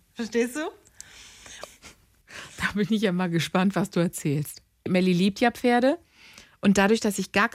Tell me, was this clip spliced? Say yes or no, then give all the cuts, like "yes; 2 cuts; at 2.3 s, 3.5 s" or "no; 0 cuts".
yes; 1 cut; at 1.6 s